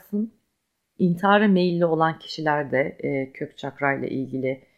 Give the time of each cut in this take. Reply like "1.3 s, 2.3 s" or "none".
1.0 s

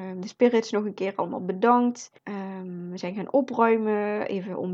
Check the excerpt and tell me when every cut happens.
2.2 s

